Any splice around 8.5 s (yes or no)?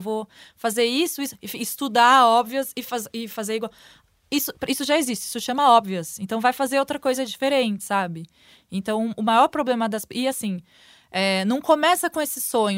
no